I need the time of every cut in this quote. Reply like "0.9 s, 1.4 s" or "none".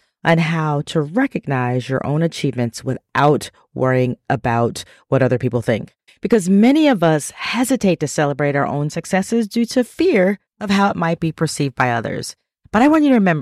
6.1 s, 10.5 s